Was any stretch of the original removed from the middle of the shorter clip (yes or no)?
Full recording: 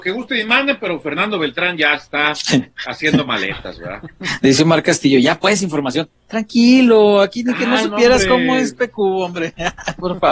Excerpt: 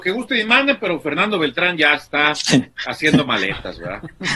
no